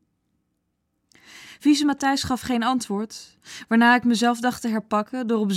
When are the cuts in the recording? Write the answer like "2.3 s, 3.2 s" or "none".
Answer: none